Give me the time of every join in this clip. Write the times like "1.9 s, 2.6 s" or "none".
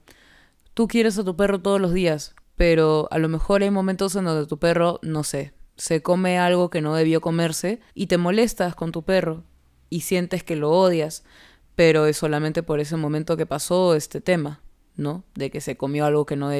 2.4 s, 7.9 s